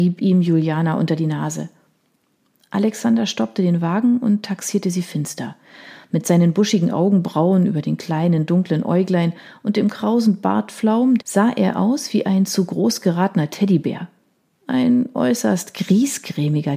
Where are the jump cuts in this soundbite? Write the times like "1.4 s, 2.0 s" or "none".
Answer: 11.2 s

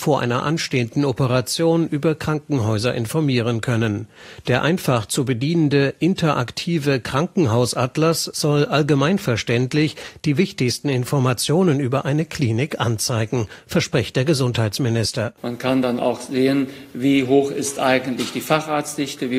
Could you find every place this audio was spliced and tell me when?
none

